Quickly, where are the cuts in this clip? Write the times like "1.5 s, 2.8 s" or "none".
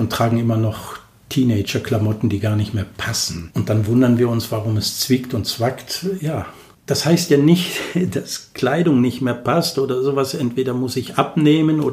none